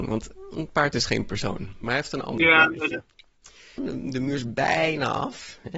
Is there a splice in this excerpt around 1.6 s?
no; 1 cut; at 3.8 s

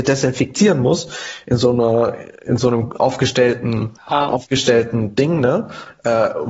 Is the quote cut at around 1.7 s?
no; 1 cut; at 4.0 s

